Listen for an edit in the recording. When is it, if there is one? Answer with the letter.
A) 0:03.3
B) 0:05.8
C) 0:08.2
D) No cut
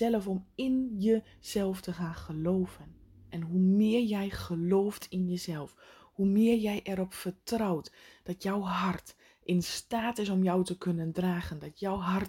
A